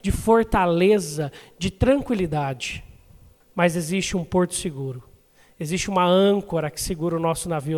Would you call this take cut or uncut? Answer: cut